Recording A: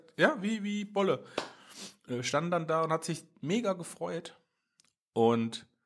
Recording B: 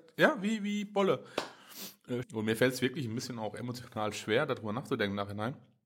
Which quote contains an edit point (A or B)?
B